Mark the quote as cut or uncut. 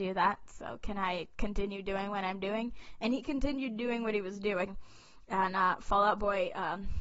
uncut